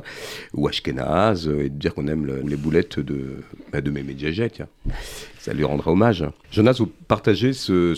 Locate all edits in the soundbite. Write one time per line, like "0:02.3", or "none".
0:02.4
0:06.4

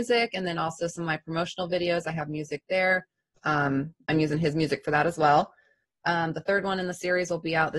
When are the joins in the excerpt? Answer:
0:03.4
0:05.8

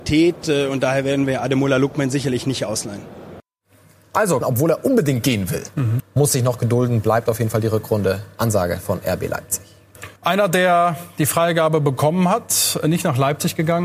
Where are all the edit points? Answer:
0:04.4
0:06.0
0:10.2

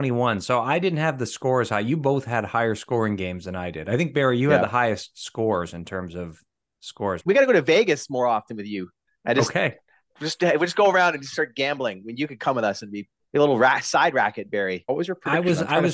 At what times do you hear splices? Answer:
0:07.2
0:14.9

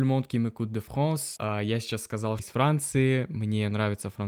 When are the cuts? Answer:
0:01.4
0:02.4

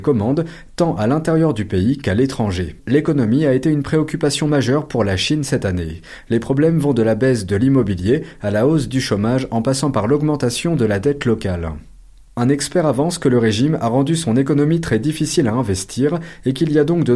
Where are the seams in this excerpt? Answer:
0:02.8

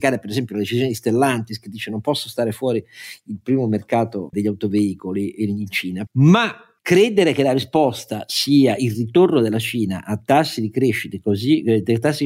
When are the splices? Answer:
0:04.3
0:06.1

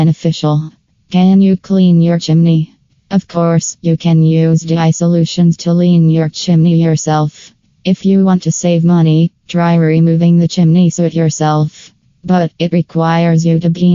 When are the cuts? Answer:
none

